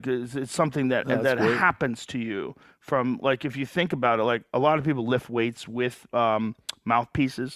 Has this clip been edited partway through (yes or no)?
no